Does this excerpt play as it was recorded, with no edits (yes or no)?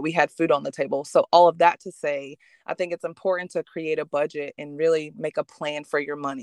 yes